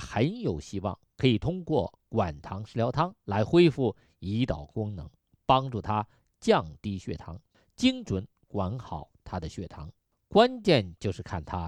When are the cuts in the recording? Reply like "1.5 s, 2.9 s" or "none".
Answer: none